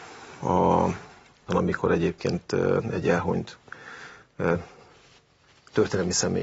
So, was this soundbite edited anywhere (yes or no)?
yes